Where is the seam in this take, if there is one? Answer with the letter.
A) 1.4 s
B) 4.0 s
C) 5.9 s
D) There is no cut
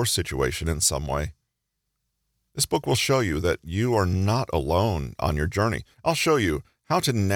C